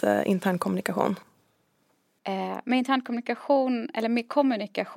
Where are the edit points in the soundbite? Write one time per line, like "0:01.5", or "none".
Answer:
none